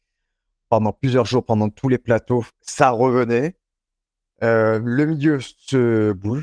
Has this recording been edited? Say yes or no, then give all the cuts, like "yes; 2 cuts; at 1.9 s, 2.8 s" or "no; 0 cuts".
no; 0 cuts